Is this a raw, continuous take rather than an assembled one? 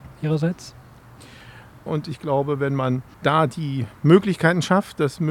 no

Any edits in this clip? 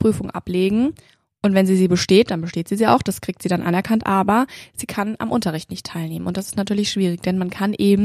no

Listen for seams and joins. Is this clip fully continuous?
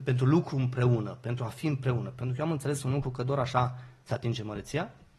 yes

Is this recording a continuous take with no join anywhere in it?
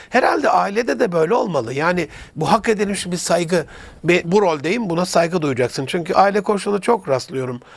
no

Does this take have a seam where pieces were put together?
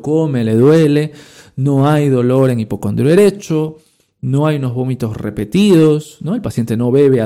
no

